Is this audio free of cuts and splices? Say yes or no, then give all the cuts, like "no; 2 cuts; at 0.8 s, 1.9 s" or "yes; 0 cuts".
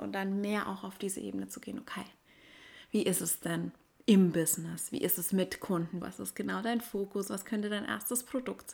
no; 1 cut; at 6.0 s